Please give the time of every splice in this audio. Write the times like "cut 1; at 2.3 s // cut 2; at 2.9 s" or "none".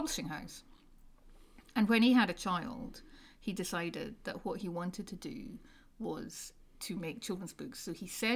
none